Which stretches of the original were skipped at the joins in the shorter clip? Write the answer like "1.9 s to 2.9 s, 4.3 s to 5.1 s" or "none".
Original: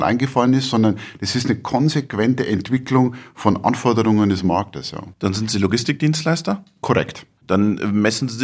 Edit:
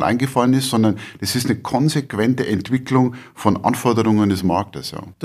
none